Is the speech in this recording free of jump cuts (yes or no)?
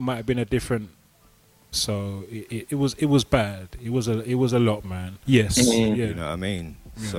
no